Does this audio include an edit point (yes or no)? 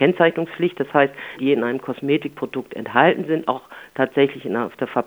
yes